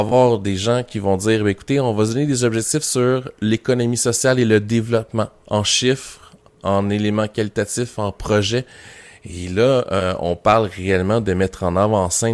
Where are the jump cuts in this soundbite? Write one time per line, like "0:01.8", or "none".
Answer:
none